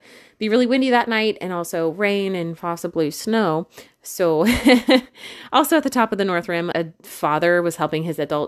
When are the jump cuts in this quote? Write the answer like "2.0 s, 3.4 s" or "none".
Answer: 6.7 s